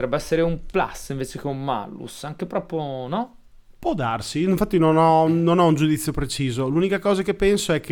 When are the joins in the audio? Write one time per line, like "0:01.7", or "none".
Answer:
none